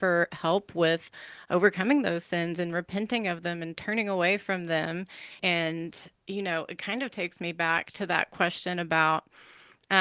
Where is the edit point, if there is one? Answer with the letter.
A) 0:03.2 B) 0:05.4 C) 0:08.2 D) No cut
B